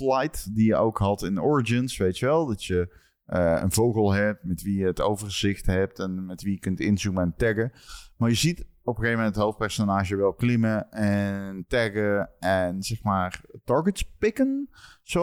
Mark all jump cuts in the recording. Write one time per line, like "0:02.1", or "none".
none